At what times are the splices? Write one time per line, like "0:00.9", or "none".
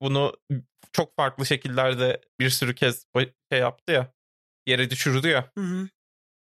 0:02.3